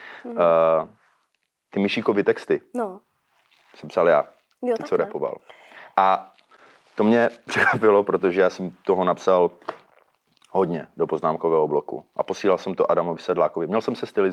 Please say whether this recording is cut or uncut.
uncut